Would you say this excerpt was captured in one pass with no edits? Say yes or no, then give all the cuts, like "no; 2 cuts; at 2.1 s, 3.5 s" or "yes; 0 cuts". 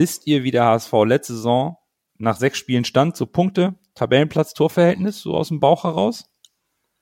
yes; 0 cuts